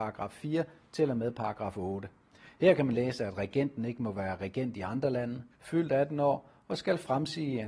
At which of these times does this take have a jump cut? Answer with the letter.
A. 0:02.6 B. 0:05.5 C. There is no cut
B